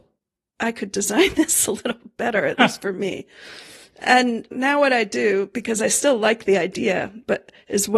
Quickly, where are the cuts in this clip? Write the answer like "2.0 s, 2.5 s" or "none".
4.5 s

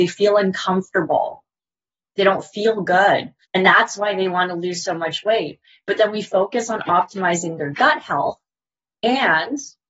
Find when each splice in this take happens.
3.4 s

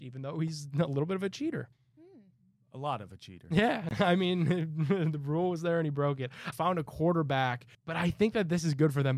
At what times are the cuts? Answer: 6.5 s, 7.7 s

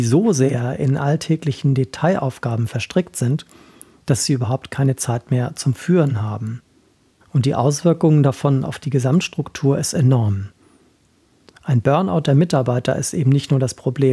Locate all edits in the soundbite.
none

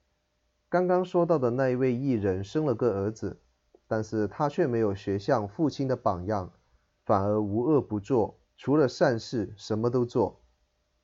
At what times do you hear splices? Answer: 7.0 s, 8.4 s

